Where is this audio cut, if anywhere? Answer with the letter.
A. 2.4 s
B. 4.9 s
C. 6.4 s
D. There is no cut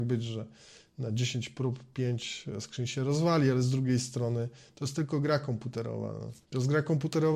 C